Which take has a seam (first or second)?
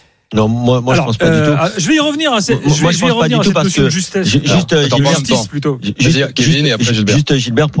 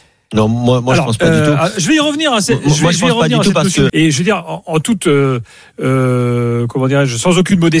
second